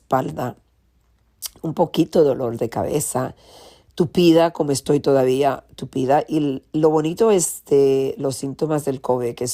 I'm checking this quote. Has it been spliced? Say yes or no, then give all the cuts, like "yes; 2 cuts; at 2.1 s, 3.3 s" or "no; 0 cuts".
yes; 1 cut; at 1.6 s